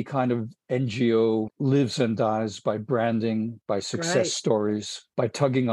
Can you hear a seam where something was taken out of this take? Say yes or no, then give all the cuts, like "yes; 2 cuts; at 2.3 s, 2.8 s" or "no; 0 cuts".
yes; 1 cut; at 1.5 s